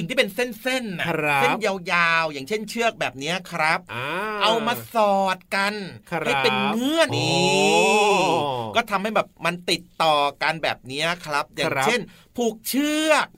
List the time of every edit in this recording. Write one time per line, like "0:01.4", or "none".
0:07.1